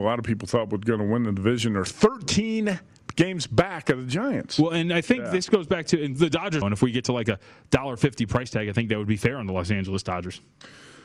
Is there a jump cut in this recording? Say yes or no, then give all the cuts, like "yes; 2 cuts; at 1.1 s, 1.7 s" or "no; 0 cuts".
yes; 1 cut; at 6.6 s